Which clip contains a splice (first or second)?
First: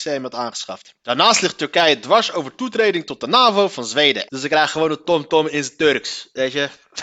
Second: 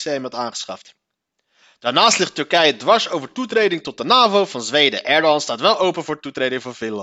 first